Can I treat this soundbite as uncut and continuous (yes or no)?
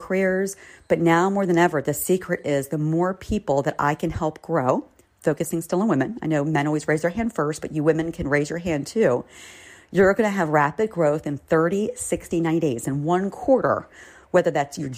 yes